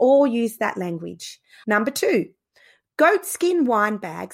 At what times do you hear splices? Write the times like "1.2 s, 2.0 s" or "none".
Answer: 1.6 s